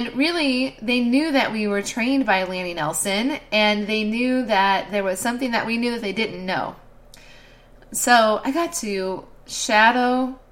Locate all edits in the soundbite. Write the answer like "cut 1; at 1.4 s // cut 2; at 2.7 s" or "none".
cut 1; at 7.8 s